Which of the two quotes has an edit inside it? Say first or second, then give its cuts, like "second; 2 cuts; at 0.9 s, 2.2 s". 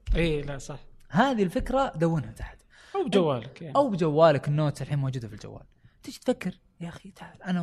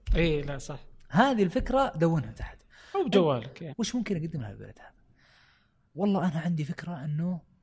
second; 1 cut; at 3.7 s